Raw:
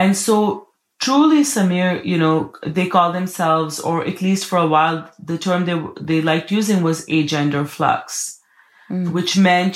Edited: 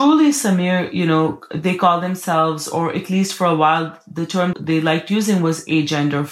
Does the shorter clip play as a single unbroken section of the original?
no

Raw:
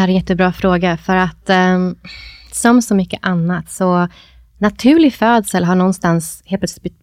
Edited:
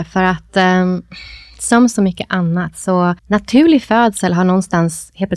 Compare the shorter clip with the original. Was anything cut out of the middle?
yes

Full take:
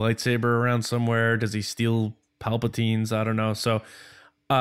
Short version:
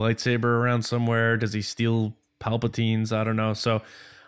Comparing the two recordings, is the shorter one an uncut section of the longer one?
yes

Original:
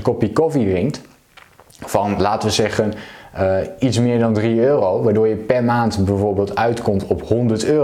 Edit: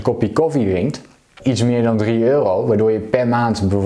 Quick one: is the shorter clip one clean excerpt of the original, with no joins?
no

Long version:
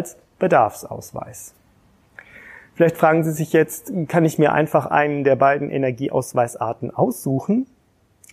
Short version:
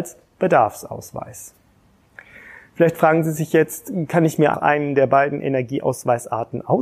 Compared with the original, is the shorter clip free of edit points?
no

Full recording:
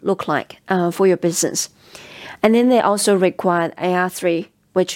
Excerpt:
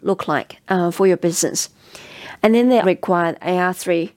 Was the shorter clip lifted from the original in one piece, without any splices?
no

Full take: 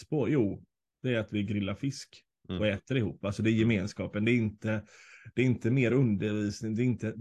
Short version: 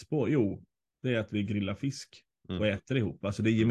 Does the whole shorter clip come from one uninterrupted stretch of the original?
yes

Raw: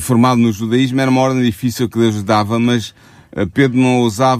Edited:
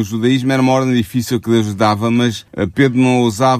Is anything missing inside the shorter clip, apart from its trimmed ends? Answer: yes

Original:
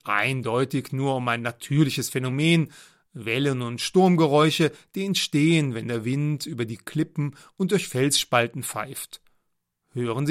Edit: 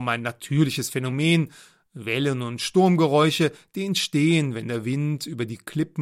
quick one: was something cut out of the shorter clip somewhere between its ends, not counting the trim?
no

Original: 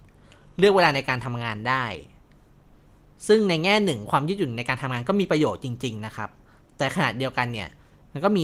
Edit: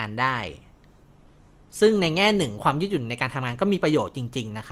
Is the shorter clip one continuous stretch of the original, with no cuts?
yes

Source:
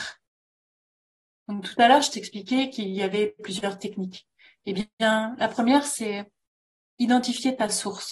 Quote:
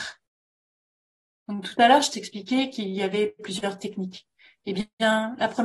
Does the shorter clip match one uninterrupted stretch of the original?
yes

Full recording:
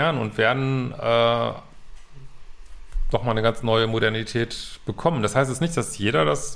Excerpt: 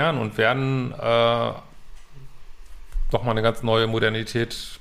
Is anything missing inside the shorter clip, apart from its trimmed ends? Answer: no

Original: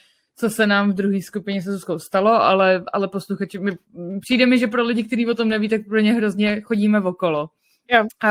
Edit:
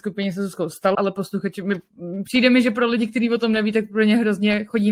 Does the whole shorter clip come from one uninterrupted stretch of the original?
no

